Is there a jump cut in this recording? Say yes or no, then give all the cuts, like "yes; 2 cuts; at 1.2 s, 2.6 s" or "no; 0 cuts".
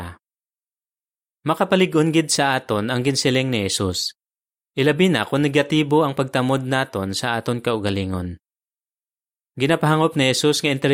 no; 0 cuts